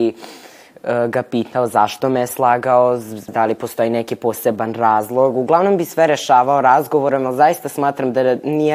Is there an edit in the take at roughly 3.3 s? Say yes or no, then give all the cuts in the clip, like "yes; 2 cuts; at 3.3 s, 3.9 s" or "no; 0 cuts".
yes; 1 cut; at 3.3 s